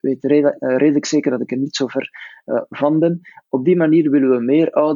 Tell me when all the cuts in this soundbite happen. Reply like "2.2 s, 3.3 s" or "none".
none